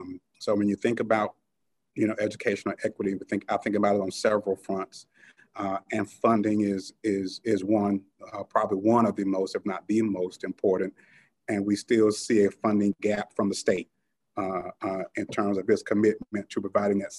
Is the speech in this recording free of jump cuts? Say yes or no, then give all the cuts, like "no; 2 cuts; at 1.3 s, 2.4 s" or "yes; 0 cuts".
yes; 0 cuts